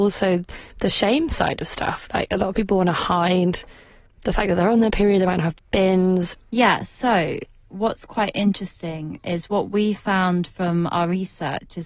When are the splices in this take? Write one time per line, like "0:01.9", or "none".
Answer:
0:06.3